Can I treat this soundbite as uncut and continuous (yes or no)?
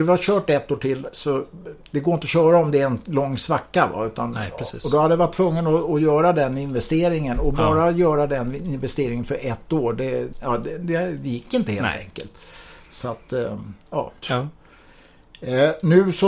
no